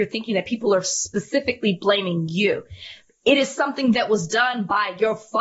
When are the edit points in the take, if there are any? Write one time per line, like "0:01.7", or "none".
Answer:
none